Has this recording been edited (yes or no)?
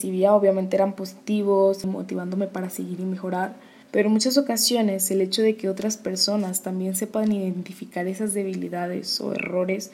yes